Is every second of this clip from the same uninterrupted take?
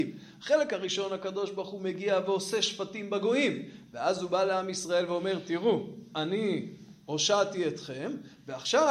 yes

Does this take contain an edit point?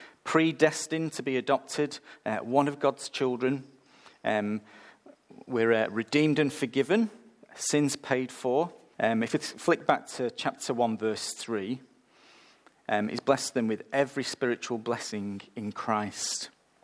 yes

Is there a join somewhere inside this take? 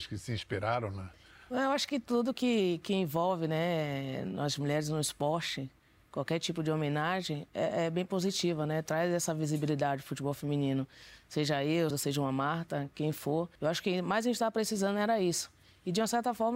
yes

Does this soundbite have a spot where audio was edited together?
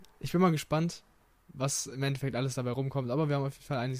no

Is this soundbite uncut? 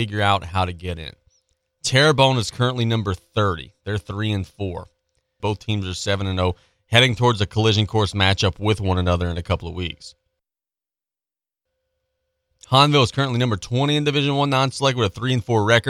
no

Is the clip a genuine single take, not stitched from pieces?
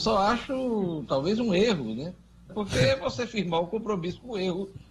no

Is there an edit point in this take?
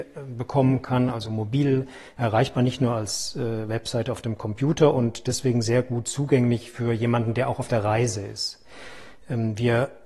no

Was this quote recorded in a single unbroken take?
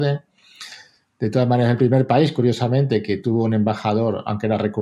yes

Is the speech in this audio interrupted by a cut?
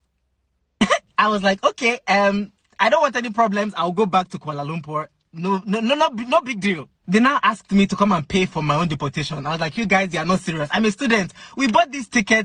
no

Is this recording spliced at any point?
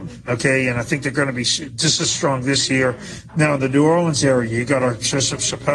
yes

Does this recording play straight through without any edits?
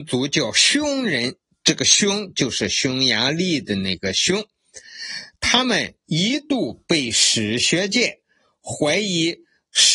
yes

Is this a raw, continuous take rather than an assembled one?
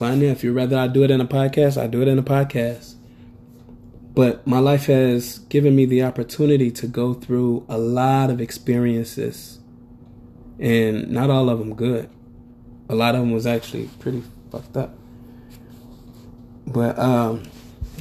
yes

